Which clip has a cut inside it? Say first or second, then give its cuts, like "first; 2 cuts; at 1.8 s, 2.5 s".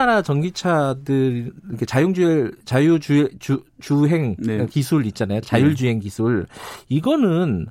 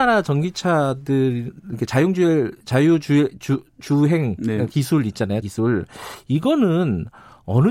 second; 1 cut; at 5.4 s